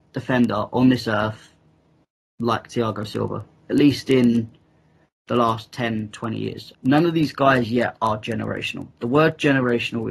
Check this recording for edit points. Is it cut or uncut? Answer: cut